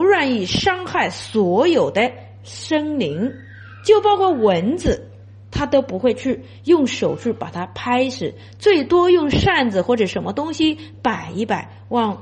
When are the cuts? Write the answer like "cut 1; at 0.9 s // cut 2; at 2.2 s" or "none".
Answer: none